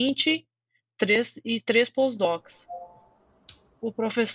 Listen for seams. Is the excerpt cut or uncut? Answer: uncut